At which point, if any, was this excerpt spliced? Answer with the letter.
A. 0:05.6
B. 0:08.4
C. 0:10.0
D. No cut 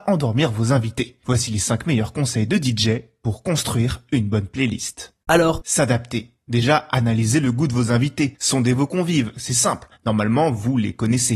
A